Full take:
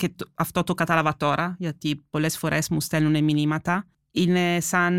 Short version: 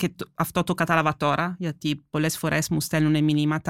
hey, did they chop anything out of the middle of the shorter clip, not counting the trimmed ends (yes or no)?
no